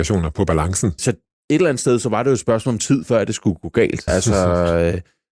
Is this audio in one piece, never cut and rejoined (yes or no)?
no